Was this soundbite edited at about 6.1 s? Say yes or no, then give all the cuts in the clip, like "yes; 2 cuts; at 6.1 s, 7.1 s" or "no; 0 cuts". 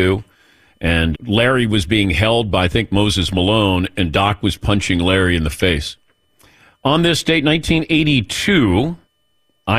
no; 1 cut; at 1.1 s